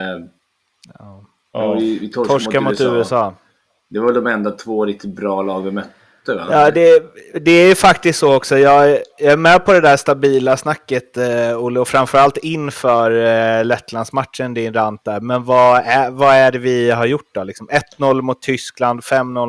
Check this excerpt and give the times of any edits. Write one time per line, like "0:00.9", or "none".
none

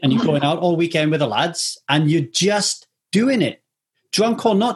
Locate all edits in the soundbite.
none

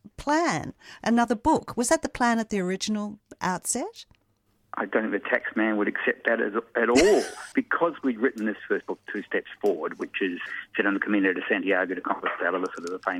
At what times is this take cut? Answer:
0:07.5

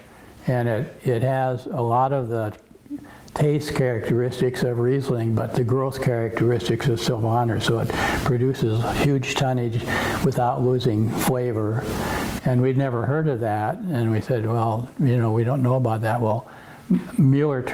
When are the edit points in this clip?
0:12.4

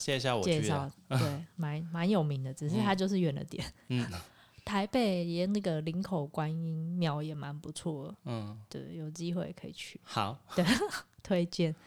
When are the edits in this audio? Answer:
none

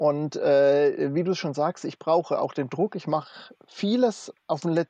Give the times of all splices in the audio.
none

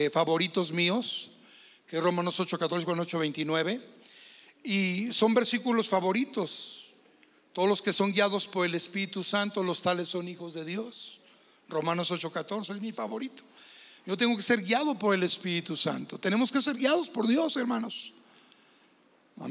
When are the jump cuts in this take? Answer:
none

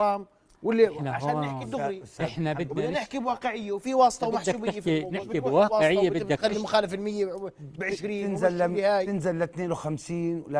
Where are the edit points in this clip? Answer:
none

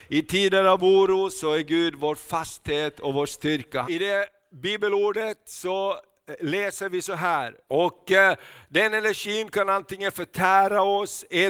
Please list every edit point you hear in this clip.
0:03.8
0:07.7

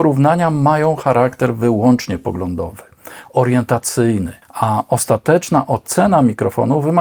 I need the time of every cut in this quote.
0:04.4

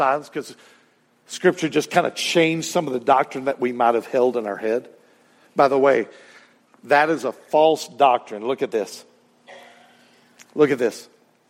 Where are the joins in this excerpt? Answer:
none

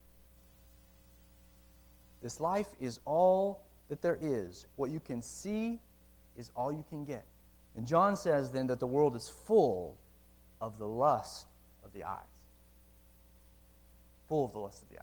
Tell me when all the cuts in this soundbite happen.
0:07.6

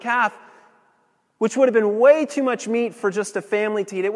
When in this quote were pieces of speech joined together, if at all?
none

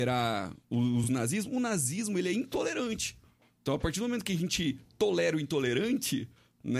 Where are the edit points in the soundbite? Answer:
none

